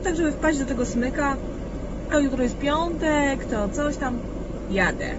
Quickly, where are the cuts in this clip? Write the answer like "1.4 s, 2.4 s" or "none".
2.1 s